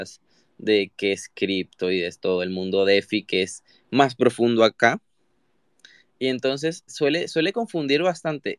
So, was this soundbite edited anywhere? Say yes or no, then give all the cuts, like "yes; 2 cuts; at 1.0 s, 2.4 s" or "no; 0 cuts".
yes; 1 cut; at 6.9 s